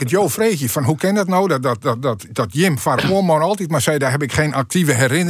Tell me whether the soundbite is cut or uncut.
uncut